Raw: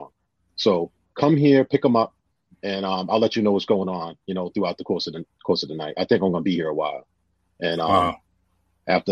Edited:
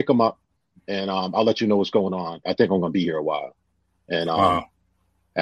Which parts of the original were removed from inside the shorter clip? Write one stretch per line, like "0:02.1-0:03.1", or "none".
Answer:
0:04.2-0:05.9